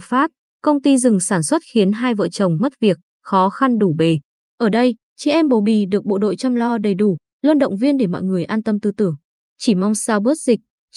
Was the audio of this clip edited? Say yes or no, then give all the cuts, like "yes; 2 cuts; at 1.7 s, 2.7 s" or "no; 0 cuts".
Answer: yes; 1 cut; at 4.5 s